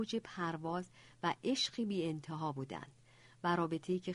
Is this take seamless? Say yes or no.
yes